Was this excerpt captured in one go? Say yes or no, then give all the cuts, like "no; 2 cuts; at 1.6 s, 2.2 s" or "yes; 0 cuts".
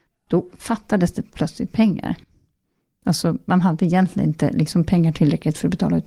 yes; 0 cuts